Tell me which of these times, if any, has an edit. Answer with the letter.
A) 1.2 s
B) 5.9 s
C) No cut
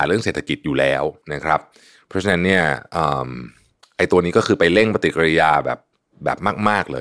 A